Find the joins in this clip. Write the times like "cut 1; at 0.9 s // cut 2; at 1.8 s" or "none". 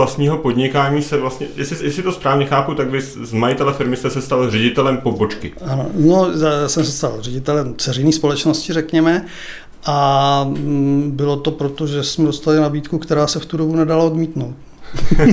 none